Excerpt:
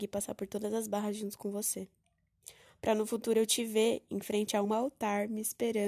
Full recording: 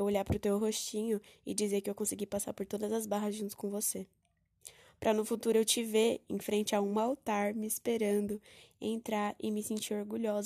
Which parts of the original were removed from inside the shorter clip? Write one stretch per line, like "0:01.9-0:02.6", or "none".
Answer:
0:06.8-0:06.9